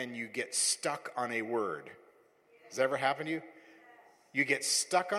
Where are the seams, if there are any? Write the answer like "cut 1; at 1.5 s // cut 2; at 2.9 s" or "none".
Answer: none